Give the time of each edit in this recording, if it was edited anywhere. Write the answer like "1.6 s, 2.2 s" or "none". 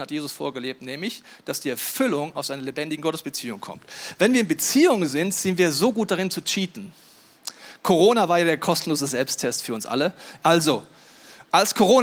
10.4 s